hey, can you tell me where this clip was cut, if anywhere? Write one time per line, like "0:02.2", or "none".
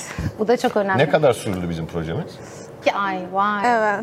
0:02.8